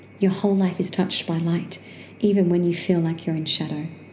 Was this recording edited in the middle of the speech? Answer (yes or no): no